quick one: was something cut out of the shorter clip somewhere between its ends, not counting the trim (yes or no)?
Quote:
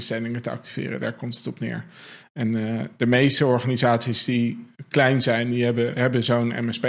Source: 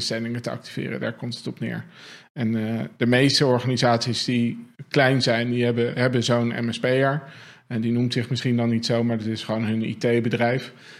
no